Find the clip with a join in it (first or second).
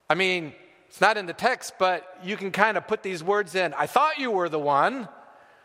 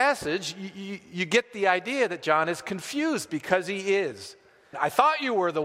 second